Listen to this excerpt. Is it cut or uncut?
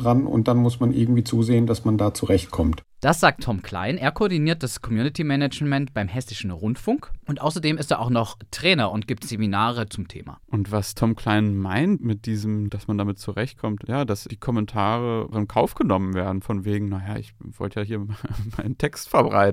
cut